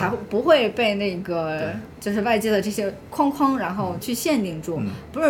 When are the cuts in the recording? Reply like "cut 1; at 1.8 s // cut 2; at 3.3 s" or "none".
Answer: cut 1; at 4.0 s